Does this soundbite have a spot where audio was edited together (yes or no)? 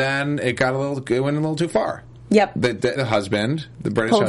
yes